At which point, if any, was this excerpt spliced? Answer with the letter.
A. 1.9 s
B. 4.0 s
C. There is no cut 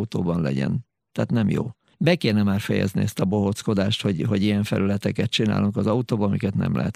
A